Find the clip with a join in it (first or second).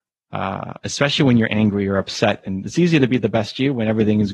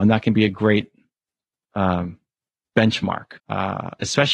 second